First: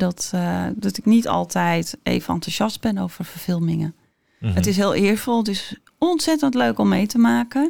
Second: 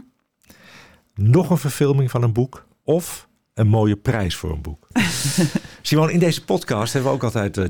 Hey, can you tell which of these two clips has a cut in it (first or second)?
second